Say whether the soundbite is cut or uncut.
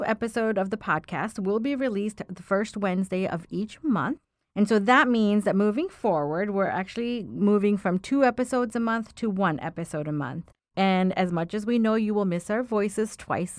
uncut